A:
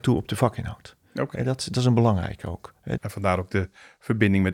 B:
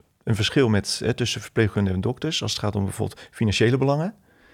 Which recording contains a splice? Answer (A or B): A